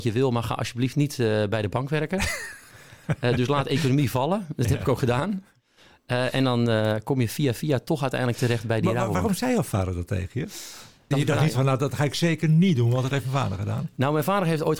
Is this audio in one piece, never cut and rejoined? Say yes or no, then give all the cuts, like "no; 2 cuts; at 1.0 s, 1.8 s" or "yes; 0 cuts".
no; 1 cut; at 11.1 s